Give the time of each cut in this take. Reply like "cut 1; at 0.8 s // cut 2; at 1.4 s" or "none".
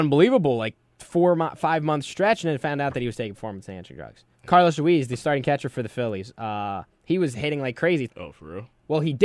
cut 1; at 4.3 s // cut 2; at 8.1 s